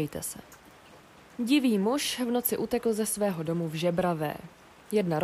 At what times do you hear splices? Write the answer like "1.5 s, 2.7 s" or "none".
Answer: 1.4 s